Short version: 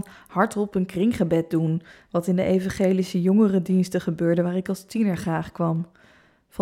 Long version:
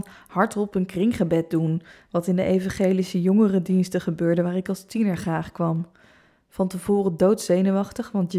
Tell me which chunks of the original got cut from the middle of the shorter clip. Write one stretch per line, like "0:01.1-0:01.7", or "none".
none